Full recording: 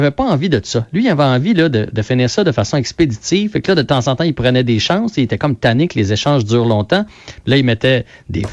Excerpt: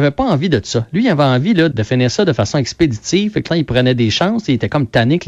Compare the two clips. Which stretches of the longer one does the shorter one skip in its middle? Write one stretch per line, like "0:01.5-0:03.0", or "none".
0:01.7-0:01.9
0:03.7-0:04.2